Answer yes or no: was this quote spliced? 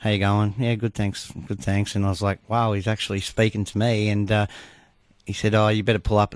no